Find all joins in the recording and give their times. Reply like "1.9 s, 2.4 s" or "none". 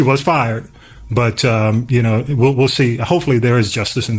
none